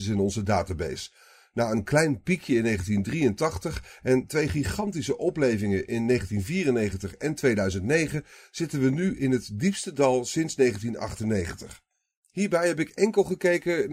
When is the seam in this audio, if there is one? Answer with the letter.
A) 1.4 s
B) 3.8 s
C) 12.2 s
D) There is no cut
D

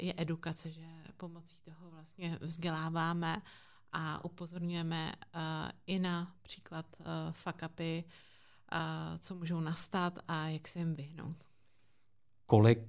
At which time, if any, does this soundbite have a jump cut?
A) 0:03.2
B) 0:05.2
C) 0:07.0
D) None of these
D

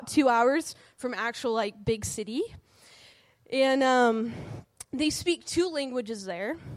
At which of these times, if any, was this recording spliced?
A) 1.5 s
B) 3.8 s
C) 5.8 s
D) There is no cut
D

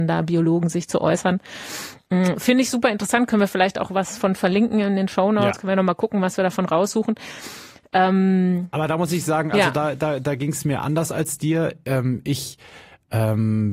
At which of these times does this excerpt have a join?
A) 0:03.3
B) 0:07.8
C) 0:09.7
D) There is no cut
D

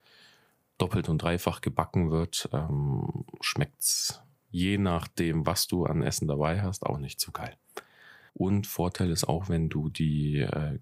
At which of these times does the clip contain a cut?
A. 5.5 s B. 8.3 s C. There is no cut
B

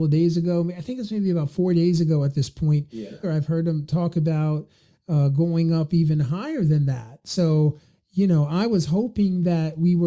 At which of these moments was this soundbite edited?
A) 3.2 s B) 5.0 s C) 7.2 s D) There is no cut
A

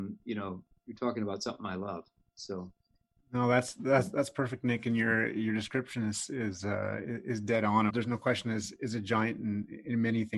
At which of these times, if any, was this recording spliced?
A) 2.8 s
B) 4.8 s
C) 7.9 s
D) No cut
C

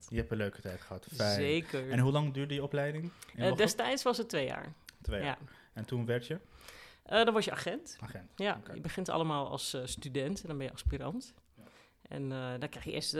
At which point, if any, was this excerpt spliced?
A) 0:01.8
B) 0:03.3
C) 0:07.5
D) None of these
D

